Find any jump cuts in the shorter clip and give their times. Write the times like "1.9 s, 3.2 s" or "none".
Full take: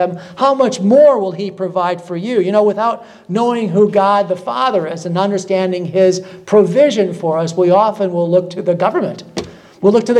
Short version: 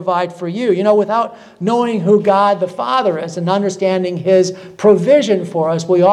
none